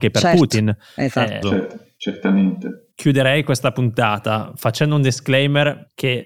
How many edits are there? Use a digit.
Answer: 2